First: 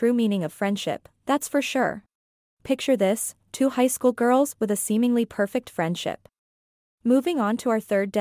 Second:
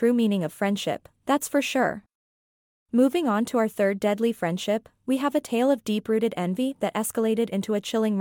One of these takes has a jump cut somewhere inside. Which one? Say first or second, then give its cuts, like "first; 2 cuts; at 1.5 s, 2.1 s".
first; 2 cuts; at 2.4 s, 6.9 s